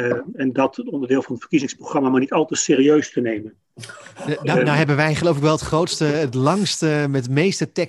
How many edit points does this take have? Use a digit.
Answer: 0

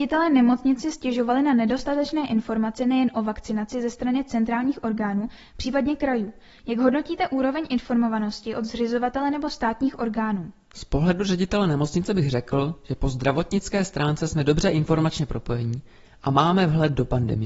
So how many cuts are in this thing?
0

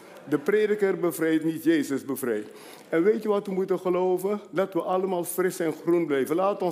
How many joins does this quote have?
0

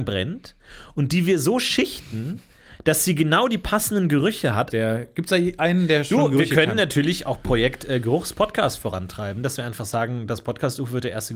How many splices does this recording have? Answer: 1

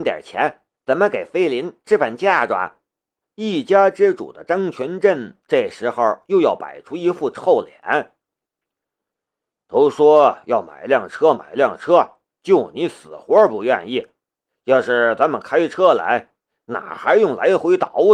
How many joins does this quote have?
1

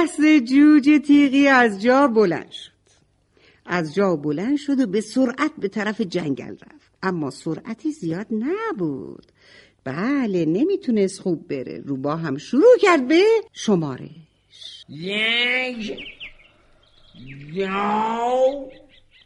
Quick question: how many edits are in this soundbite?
2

